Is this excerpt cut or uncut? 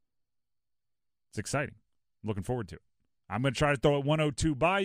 cut